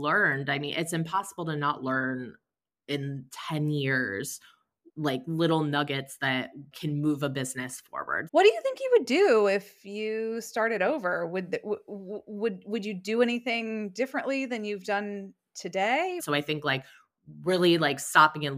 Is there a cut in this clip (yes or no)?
yes